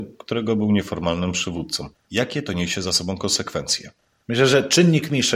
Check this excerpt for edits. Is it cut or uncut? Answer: uncut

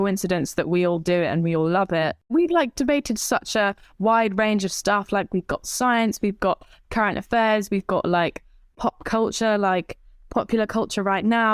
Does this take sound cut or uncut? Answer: uncut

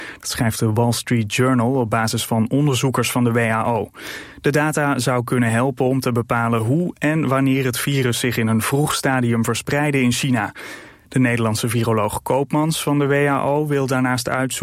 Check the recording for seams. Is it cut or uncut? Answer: uncut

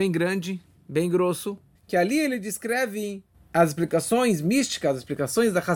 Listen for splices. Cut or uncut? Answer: cut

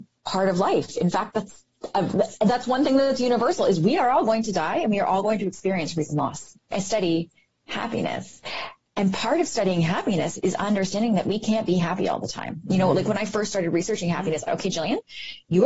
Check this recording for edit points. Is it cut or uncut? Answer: cut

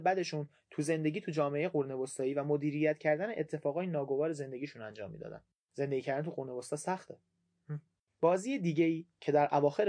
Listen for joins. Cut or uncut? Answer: uncut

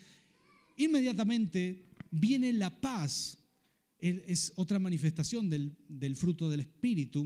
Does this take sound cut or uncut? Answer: uncut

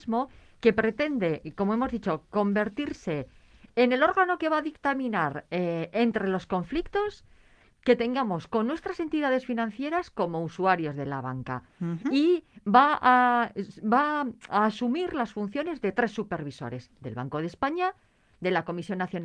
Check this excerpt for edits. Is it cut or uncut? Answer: uncut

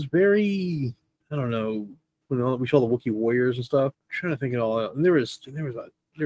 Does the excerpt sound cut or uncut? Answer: cut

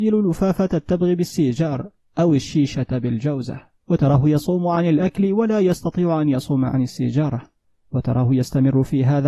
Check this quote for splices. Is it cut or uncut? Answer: cut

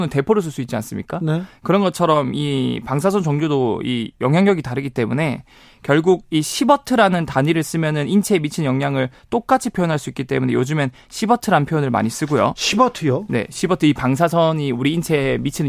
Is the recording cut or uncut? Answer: uncut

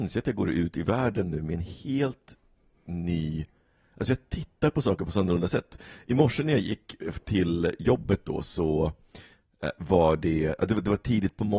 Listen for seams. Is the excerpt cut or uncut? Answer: uncut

